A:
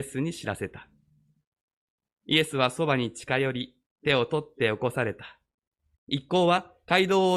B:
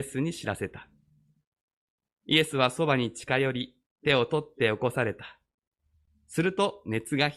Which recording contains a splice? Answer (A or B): A